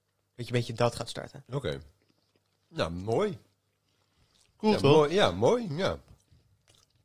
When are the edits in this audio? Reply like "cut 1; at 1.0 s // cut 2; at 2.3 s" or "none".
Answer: none